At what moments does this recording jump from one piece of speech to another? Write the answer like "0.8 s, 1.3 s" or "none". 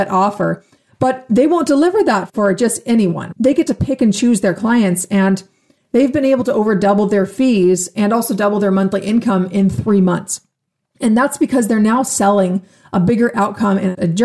none